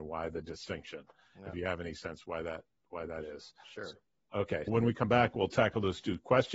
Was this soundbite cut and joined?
yes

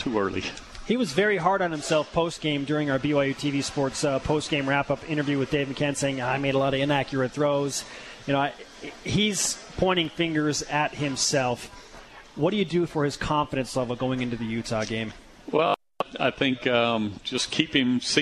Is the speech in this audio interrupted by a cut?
no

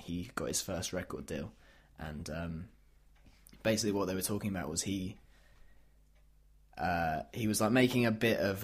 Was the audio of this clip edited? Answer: no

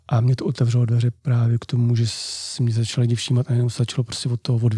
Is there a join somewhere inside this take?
no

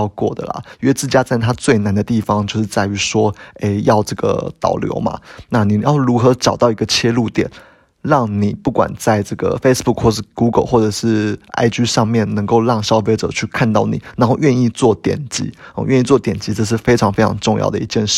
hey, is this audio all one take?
yes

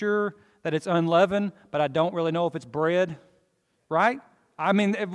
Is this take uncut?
yes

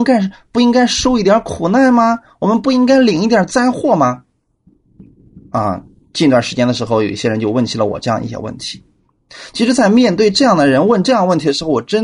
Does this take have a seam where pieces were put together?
no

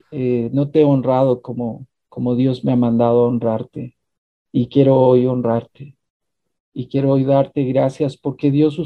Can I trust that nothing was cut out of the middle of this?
yes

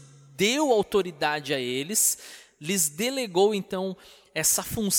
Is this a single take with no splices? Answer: yes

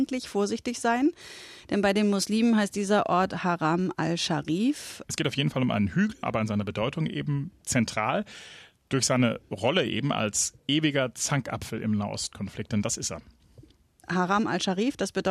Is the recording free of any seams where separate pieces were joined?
no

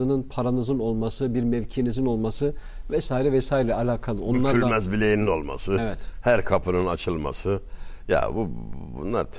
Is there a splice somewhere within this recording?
no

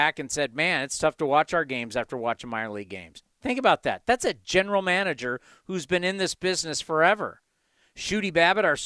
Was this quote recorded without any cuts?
yes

